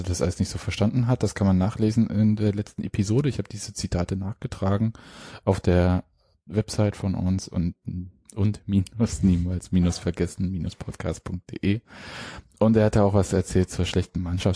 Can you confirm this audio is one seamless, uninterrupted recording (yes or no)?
yes